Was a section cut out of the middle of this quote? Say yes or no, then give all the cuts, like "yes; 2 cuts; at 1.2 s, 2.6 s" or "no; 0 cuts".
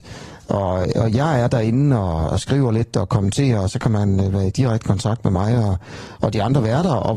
no; 0 cuts